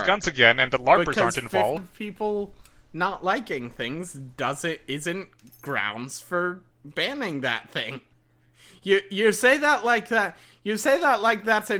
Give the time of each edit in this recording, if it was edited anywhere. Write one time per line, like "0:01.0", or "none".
0:01.8